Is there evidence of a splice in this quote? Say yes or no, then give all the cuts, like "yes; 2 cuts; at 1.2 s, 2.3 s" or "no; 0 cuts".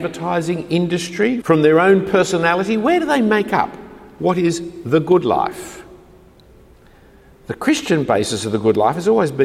yes; 1 cut; at 1.4 s